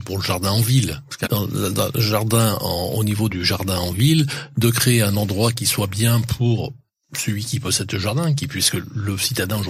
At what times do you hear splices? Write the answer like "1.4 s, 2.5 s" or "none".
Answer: 1.2 s, 3.3 s